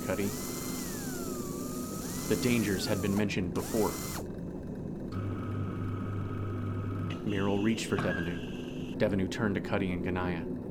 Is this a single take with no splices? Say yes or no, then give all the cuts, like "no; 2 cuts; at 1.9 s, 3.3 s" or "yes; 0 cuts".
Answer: no; 2 cuts; at 5.1 s, 8.9 s